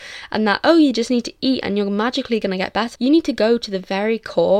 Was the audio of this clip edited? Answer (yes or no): yes